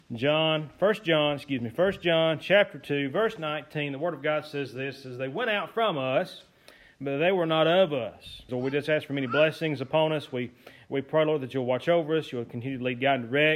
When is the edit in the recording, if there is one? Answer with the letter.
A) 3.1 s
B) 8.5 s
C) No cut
B